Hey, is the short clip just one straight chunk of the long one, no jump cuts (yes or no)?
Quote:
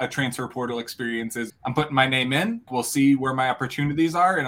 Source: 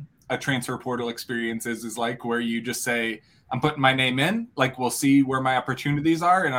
no